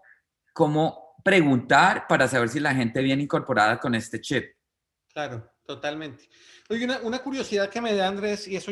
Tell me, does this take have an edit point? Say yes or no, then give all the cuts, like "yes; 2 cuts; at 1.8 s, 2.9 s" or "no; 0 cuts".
no; 0 cuts